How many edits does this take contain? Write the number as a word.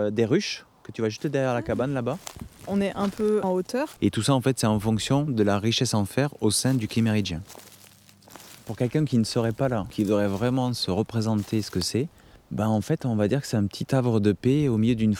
one